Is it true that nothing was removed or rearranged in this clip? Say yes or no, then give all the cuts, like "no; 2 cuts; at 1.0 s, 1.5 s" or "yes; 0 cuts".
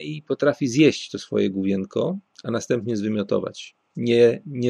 yes; 0 cuts